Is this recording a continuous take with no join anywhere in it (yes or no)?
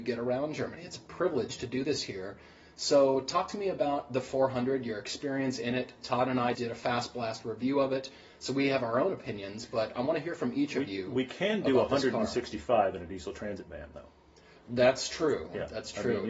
no